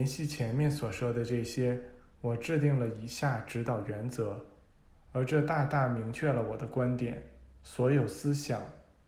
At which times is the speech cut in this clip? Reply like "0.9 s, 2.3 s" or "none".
7.5 s

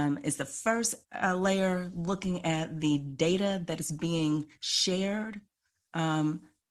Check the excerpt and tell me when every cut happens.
none

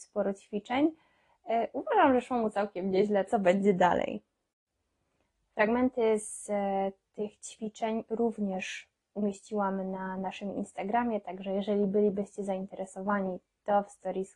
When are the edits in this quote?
3.3 s

